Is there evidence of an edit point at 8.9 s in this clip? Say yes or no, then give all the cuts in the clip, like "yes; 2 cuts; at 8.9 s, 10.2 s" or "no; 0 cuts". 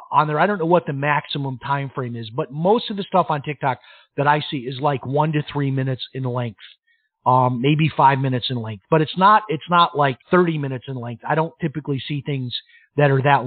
no; 1 cut; at 10.2 s